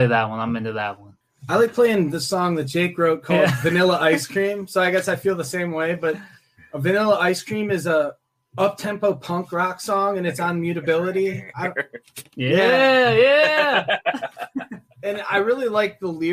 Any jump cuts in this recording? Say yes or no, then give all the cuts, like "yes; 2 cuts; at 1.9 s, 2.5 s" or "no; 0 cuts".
yes; 1 cut; at 1.2 s